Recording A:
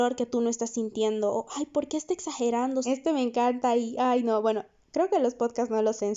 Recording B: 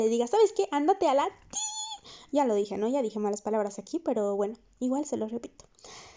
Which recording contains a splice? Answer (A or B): A